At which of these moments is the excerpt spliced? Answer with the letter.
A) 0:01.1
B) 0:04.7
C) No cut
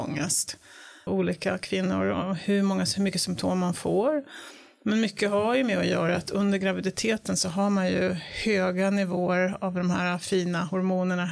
A